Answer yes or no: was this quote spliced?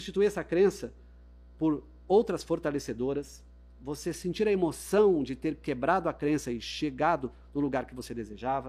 no